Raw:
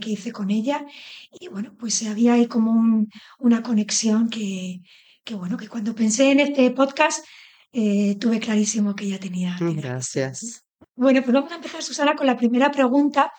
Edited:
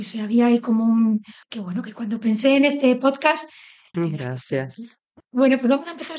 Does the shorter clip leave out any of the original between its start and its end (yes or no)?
yes